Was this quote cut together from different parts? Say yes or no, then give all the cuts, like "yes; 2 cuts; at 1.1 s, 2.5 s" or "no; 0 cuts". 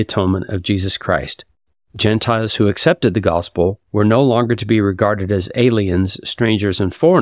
no; 0 cuts